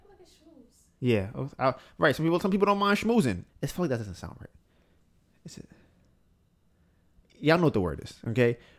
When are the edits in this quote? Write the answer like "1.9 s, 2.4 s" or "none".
3.5 s